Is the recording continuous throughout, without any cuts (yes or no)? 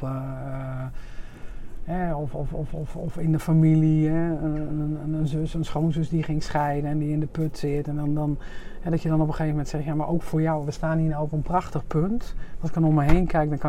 yes